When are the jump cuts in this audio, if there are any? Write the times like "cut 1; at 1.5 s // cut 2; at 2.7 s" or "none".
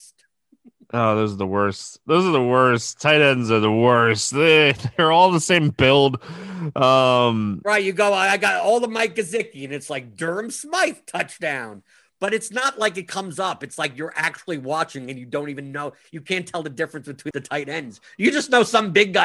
cut 1; at 17.3 s

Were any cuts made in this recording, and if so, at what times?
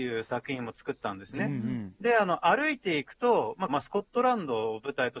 cut 1; at 1.4 s // cut 2; at 3.7 s

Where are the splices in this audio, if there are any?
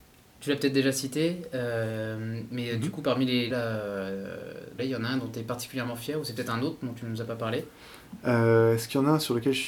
cut 1; at 3.5 s // cut 2; at 4.8 s

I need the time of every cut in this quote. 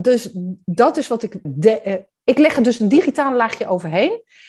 cut 1; at 1.4 s

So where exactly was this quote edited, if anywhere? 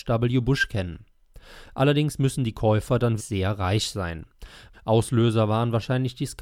cut 1; at 3.2 s // cut 2; at 4.7 s

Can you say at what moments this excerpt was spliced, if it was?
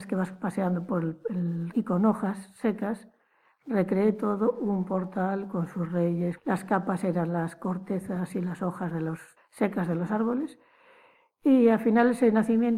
cut 1; at 1.7 s // cut 2; at 6.4 s // cut 3; at 9.4 s

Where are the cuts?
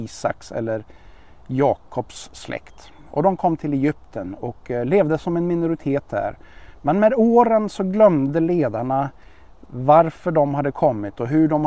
none

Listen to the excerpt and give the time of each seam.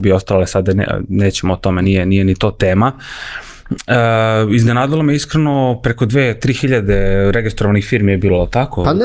none

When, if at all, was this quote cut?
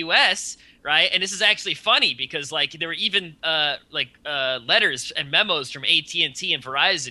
none

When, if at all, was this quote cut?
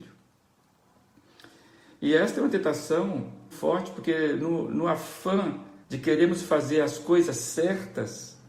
cut 1; at 3.5 s // cut 2; at 5.8 s

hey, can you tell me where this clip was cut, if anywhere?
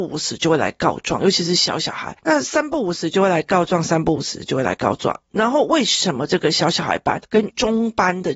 none

